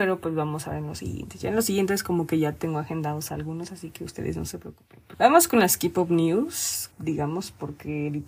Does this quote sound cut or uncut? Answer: cut